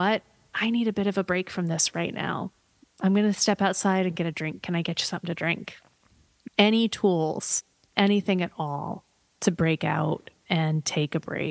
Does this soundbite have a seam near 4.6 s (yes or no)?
no